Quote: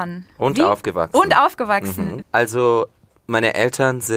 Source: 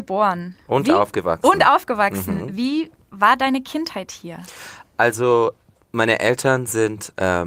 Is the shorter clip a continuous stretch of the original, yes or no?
no